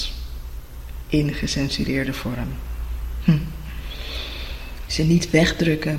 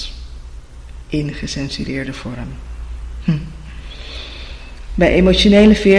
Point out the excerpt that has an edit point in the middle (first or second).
first